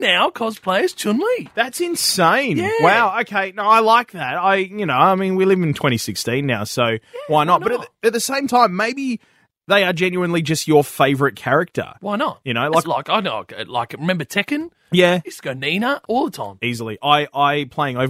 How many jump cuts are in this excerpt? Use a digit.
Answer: 2